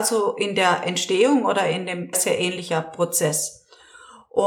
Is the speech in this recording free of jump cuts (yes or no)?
no